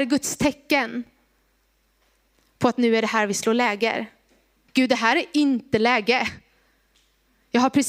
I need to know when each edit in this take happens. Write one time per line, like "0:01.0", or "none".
0:04.7